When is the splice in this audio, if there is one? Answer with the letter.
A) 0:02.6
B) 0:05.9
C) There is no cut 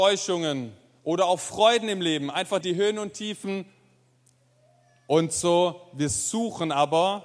A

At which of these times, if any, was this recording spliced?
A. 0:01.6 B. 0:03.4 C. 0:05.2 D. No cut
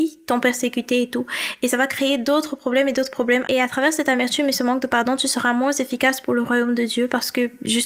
B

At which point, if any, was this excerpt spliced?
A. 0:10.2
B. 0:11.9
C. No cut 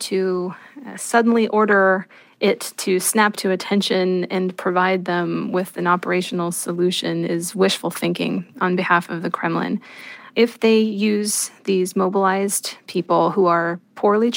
A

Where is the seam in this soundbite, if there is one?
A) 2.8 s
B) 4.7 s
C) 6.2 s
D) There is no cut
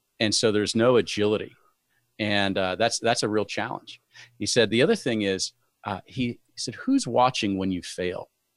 D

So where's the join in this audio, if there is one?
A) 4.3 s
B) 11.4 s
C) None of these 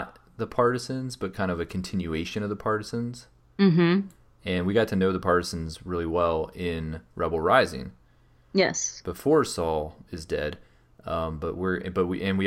C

